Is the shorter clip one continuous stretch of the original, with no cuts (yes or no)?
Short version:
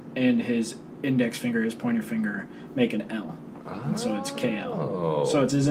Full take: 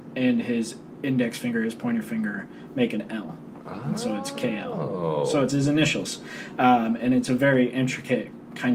yes